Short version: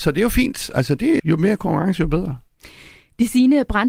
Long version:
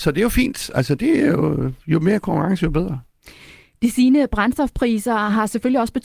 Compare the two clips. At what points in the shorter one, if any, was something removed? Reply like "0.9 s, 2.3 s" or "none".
1.2 s